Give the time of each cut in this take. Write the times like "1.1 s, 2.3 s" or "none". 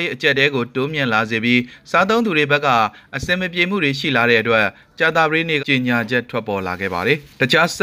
5.6 s